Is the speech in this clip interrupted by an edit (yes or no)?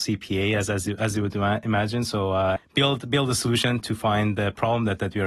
yes